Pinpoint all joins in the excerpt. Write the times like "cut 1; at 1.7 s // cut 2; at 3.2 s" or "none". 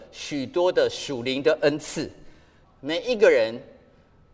cut 1; at 2.6 s